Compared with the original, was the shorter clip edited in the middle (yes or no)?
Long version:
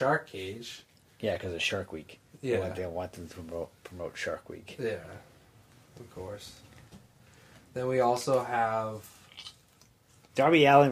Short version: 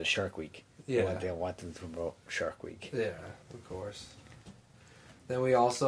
yes